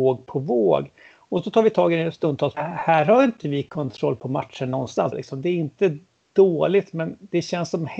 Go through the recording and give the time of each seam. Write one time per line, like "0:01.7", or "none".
0:02.5
0:05.1